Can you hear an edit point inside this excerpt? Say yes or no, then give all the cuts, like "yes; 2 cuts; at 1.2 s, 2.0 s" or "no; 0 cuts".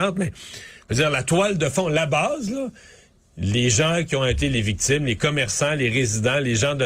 no; 0 cuts